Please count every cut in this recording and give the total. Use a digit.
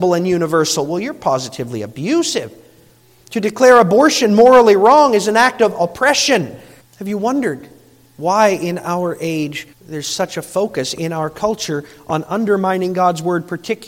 2